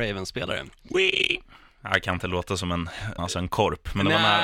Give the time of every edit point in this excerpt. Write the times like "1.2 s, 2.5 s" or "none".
3.2 s